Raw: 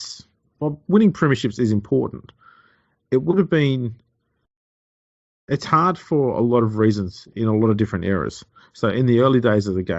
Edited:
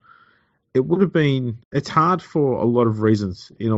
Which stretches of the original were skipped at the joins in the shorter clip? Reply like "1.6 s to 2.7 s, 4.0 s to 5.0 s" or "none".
4.0 s to 5.4 s